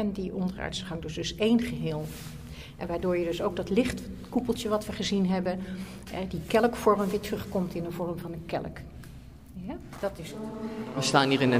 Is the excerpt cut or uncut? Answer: uncut